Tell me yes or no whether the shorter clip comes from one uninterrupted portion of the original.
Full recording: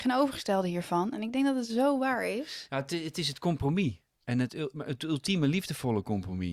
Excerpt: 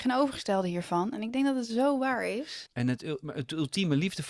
no